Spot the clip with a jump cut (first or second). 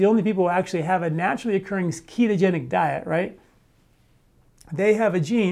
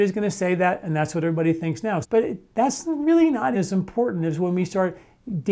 second